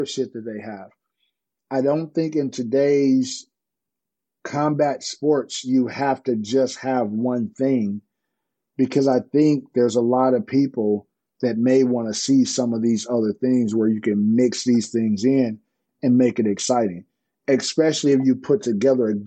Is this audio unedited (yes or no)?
yes